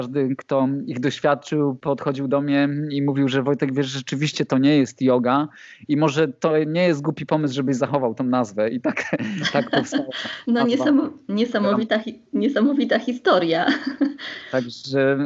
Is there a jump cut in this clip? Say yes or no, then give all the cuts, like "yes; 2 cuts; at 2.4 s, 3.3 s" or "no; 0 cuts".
no; 0 cuts